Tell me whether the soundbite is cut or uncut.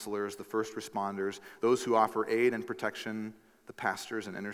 uncut